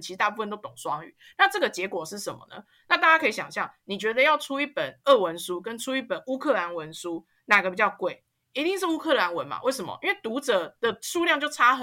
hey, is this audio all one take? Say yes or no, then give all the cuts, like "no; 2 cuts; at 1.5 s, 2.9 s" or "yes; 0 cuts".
yes; 0 cuts